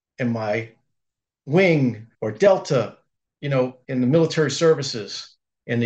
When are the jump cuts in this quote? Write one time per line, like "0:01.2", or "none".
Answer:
0:02.1
0:03.8